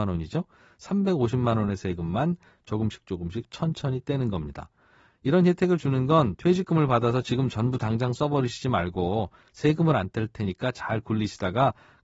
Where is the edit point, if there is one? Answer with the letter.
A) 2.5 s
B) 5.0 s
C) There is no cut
C